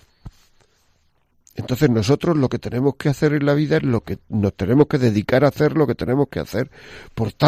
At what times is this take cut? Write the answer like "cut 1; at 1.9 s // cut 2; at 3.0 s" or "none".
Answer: none